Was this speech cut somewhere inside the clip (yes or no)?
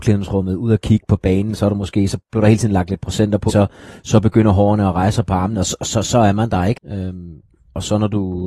yes